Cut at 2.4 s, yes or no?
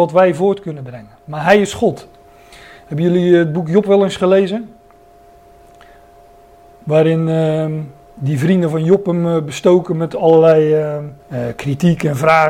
no